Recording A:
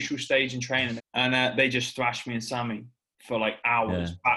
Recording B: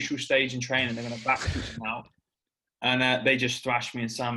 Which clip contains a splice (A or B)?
A